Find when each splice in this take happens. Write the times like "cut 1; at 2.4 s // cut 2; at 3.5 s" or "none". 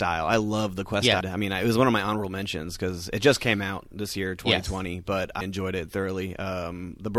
cut 1; at 1.2 s // cut 2; at 5.4 s